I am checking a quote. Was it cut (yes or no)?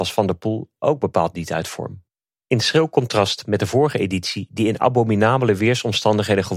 no